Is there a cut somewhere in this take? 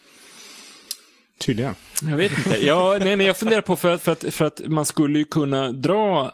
no; 0 cuts

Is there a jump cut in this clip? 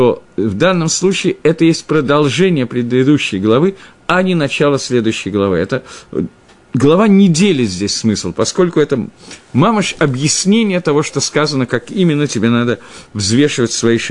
no; 0 cuts

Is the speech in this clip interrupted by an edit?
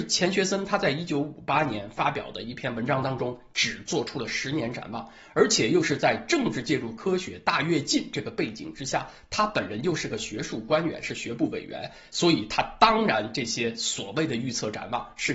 no; 0 cuts

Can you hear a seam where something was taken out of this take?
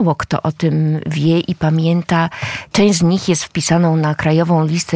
yes; 1 cut; at 2.7 s

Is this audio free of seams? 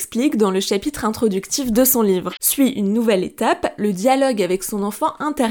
no; 1 cut; at 2.4 s

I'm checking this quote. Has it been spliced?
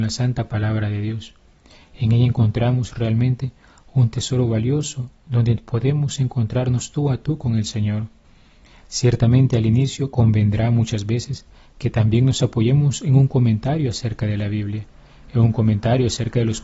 no; 0 cuts

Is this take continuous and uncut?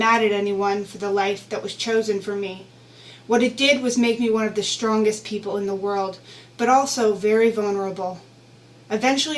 yes; 0 cuts

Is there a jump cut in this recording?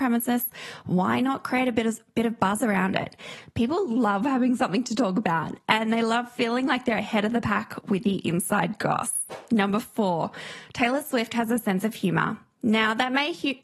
no; 0 cuts

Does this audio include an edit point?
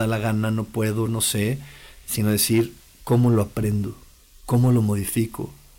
no; 0 cuts

